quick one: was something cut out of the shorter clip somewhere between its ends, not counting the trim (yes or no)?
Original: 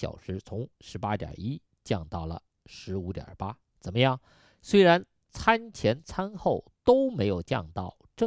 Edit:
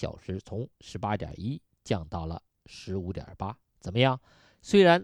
no